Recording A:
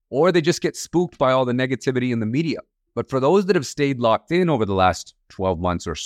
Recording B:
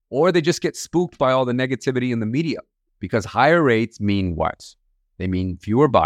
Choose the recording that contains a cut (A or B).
B